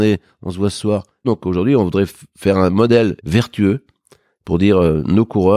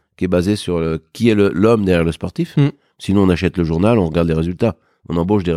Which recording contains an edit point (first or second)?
first